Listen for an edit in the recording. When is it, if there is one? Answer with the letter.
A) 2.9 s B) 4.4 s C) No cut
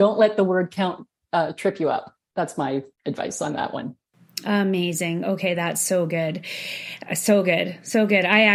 A